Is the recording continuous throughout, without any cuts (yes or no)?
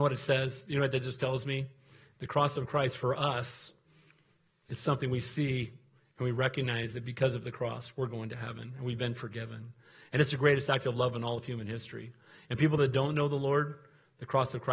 yes